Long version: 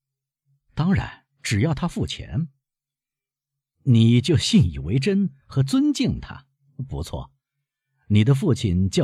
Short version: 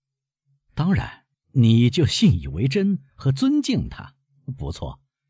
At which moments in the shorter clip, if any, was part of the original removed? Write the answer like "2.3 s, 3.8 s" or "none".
1.3 s